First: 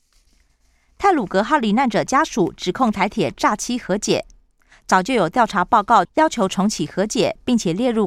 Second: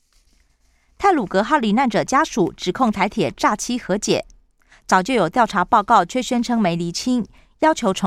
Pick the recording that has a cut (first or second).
first